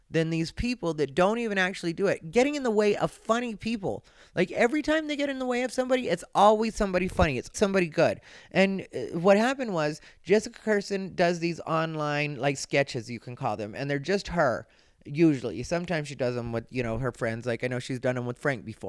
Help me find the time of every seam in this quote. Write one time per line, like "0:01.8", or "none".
0:07.5